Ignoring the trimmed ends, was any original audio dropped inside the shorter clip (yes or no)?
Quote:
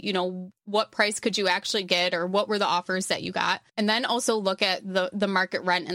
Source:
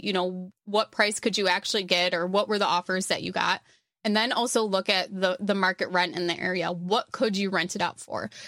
yes